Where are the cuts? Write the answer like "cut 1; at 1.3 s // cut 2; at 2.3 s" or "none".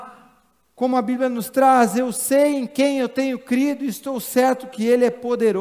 none